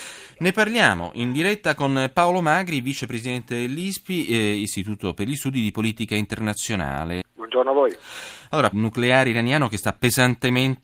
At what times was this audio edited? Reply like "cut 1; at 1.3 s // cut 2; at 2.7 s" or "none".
cut 1; at 7.2 s // cut 2; at 8.7 s